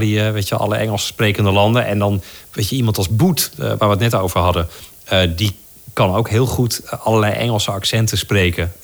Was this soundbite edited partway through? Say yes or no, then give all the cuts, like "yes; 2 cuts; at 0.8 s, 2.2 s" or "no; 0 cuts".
no; 0 cuts